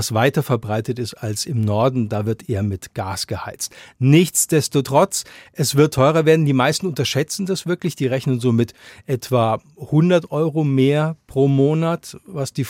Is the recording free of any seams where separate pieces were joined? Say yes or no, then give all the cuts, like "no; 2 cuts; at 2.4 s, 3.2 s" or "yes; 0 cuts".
yes; 0 cuts